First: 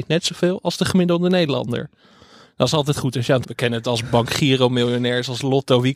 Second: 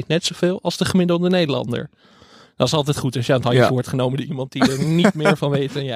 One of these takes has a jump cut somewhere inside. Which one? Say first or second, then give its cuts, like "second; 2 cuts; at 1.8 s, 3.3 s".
first; 1 cut; at 3.4 s